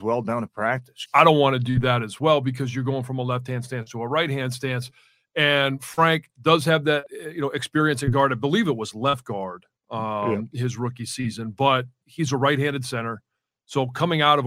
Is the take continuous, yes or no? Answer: no